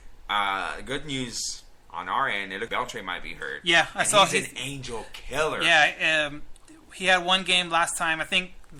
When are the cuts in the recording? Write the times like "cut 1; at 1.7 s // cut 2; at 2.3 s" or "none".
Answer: cut 1; at 2.7 s

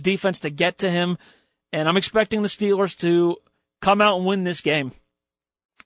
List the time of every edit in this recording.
none

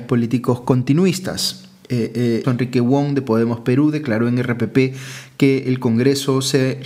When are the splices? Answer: cut 1; at 2.4 s

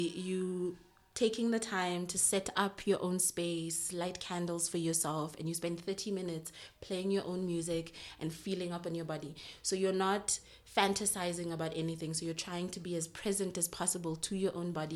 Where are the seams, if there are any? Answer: none

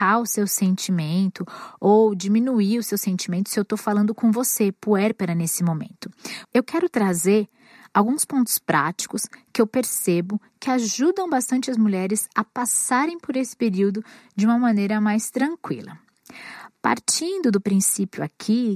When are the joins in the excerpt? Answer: cut 1; at 6.4 s

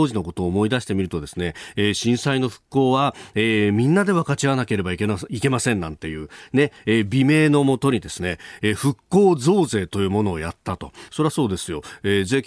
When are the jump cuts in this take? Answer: cut 1; at 8.6 s // cut 2; at 11.1 s

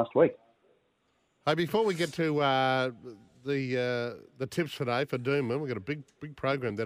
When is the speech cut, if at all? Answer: cut 1; at 4.3 s

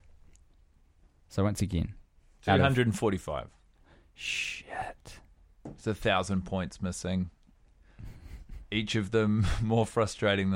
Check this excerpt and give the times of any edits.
none

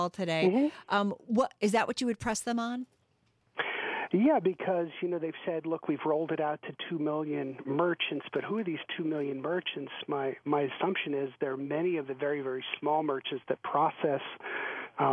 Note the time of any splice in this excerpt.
none

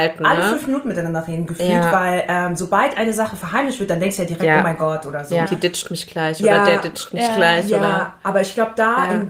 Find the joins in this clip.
cut 1; at 5.5 s

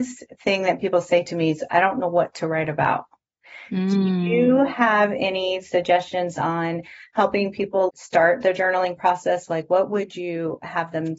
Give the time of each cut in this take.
cut 1; at 7.9 s

